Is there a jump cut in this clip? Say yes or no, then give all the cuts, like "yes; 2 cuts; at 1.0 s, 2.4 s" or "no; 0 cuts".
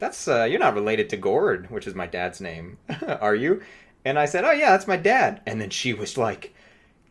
yes; 2 cuts; at 2.8 s, 6.1 s